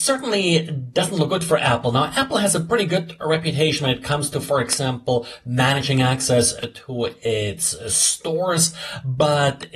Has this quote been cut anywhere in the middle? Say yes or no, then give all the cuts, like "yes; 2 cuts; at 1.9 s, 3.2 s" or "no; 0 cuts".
no; 0 cuts